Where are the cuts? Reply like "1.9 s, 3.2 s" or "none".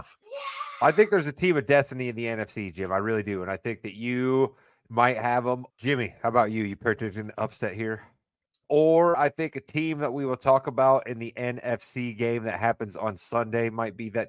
5.7 s, 8.6 s